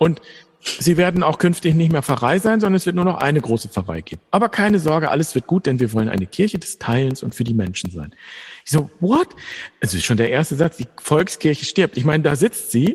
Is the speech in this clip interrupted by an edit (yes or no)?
no